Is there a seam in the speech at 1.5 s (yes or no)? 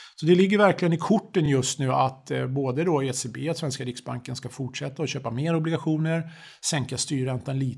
no